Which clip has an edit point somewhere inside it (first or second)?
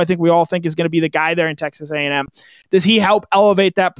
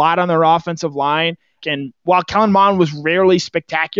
second